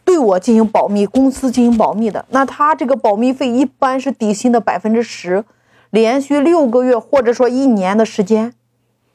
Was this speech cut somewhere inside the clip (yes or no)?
no